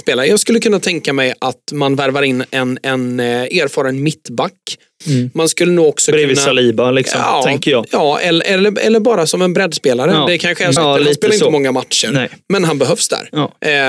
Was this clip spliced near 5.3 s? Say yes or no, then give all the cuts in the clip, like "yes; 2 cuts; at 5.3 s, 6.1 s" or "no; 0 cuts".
no; 1 cut; at 10.8 s